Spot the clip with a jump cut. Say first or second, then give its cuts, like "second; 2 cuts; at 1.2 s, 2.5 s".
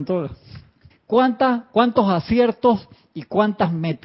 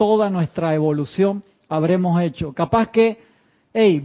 first; 1 cut; at 0.9 s